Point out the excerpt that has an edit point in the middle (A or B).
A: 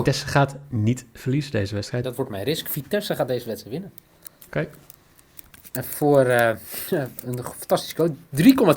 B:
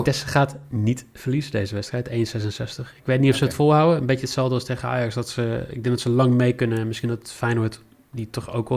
A